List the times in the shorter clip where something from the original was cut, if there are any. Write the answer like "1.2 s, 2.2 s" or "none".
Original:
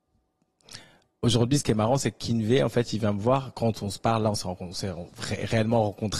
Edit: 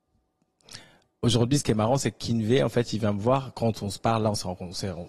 none